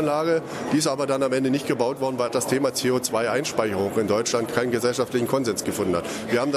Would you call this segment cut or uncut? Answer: cut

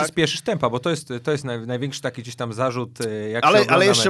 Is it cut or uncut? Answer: uncut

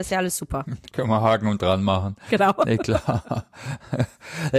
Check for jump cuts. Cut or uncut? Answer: uncut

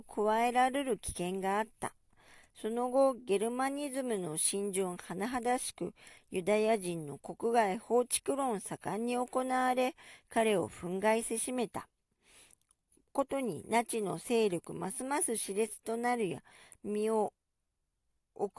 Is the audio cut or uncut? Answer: uncut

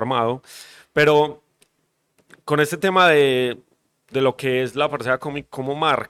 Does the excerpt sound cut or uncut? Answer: uncut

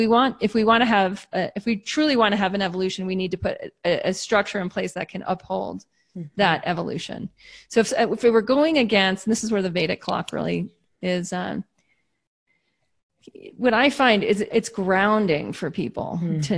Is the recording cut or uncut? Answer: cut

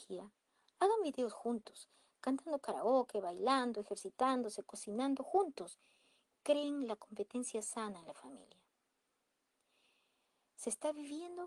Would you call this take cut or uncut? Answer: uncut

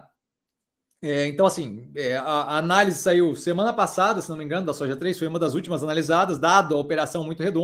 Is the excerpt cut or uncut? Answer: uncut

